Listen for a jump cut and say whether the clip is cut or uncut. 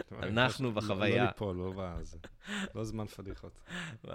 uncut